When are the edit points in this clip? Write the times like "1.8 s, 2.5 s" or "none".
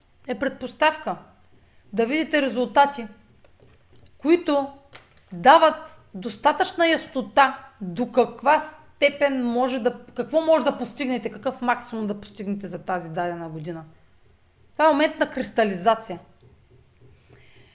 none